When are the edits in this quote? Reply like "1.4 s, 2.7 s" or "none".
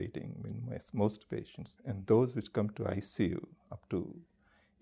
1.8 s